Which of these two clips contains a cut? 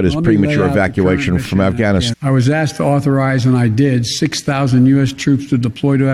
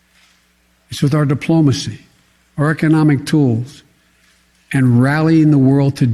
first; 1 cut; at 2.1 s

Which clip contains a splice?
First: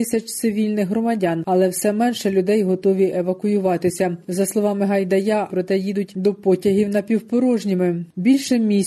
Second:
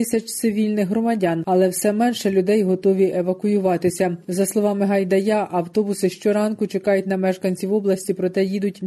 first; 1 cut; at 5.5 s

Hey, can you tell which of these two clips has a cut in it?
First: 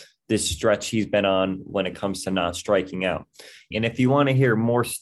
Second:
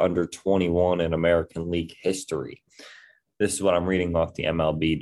first; 1 cut; at 3.7 s

